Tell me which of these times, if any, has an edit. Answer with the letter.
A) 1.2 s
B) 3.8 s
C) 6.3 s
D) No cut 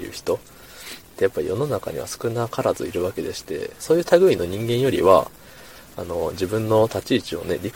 B